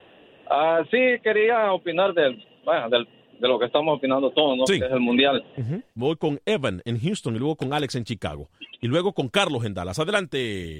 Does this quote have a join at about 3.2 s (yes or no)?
no